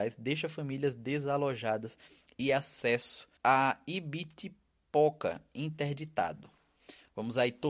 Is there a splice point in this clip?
yes; 1 cut; at 3.4 s

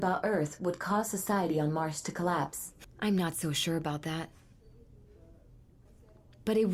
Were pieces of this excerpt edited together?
yes; 1 cut; at 2.8 s

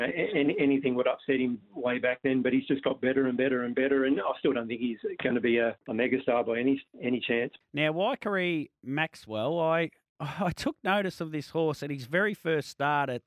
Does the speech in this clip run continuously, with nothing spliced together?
no; 2 cuts; at 5.8 s, 7.6 s

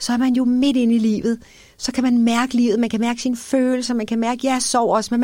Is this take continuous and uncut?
yes; 0 cuts

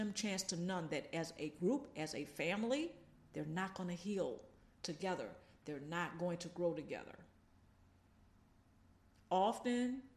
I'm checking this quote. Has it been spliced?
no; 0 cuts

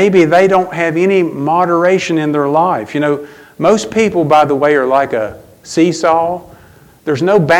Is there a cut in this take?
no; 0 cuts

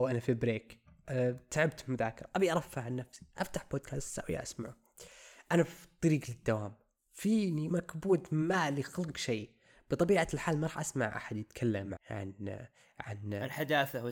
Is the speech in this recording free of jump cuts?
no; 2 cuts; at 7.7 s, 12.0 s

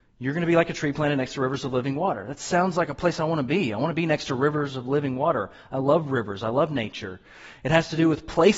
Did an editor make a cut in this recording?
no; 0 cuts

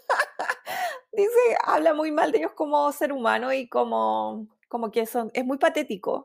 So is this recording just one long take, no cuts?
yes; 0 cuts

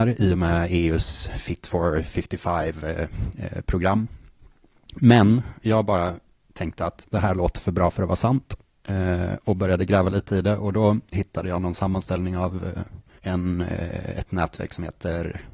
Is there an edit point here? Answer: yes; 1 cut; at 5.6 s

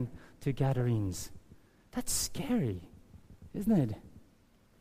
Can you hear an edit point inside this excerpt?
no; 0 cuts

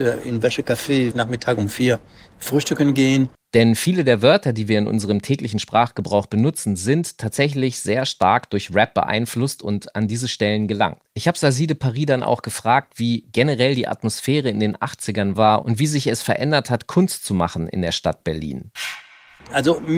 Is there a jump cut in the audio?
yes; 3 cuts; at 1.1 s, 3.4 s, 11.0 s

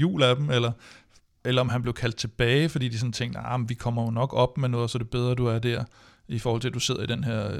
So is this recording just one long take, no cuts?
yes; 0 cuts

